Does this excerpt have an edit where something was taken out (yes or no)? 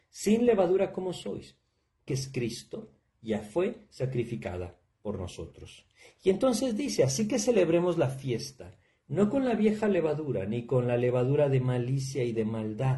yes